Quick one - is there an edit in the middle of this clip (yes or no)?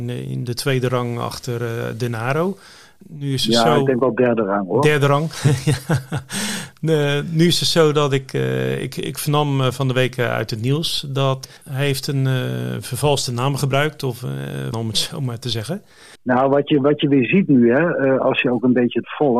yes